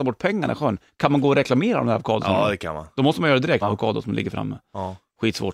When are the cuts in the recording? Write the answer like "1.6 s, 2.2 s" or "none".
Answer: 3.6 s